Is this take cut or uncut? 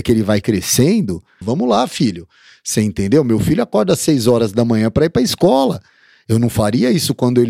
cut